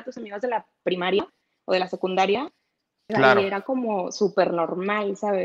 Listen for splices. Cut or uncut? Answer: cut